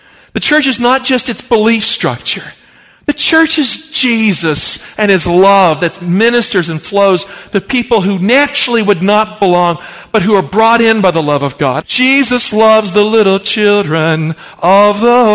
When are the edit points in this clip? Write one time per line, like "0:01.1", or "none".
0:11.8